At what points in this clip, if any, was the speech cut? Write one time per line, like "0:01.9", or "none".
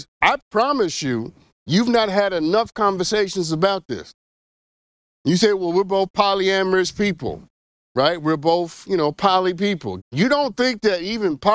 0:10.0

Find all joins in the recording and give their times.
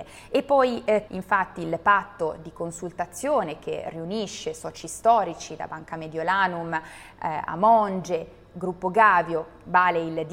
0:01.1

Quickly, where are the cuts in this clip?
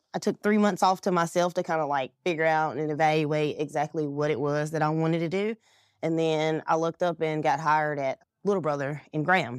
none

